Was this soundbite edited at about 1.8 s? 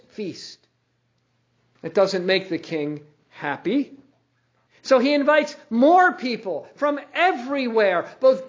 yes; 2 cuts; at 1.8 s, 4.7 s

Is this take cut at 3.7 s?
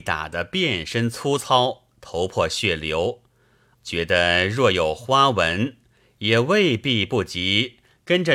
yes; 1 cut; at 3.7 s

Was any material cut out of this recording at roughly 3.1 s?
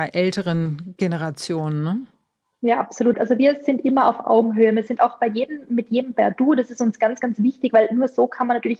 yes; 1 cut; at 3.1 s

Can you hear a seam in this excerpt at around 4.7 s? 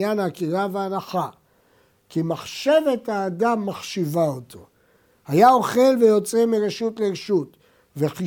no; 1 cut; at 1.9 s

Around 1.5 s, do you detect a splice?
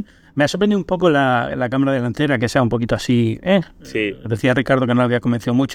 no; 0 cuts

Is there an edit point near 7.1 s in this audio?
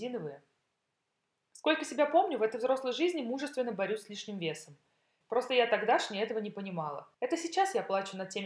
yes; 2 cuts; at 5.2 s, 7.1 s

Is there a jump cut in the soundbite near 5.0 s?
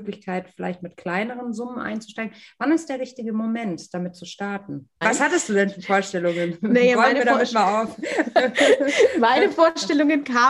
yes; 1 cut; at 5.0 s

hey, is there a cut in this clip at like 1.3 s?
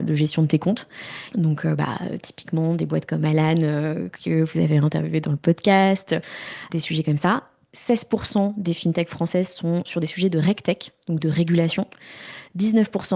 yes; 1 cut; at 1.3 s

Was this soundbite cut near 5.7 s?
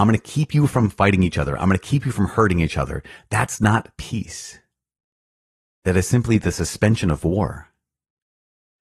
no; 0 cuts

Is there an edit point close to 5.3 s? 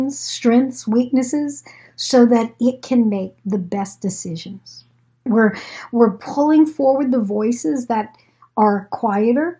yes; 1 cut; at 5.3 s

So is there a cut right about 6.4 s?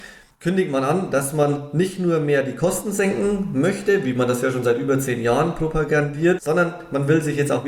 yes; 1 cut; at 6.4 s

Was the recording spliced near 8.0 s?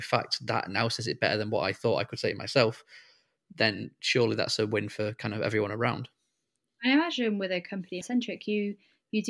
yes; 1 cut; at 8.0 s

